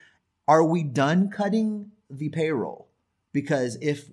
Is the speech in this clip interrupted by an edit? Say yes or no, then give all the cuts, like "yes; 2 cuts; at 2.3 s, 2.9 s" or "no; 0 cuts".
no; 0 cuts